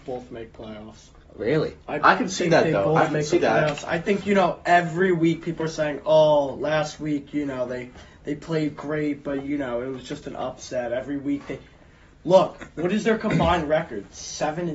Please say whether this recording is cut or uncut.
uncut